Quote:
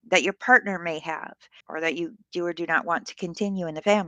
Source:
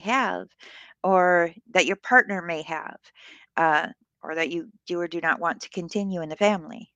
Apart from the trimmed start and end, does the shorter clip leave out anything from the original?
yes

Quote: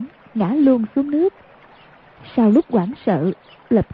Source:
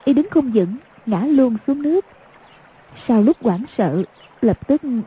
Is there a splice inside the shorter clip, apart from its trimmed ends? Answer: no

